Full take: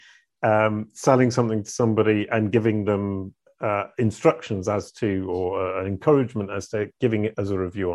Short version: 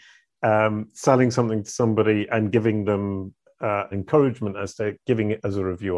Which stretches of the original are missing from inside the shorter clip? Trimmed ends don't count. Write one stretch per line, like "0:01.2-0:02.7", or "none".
0:03.9-0:05.8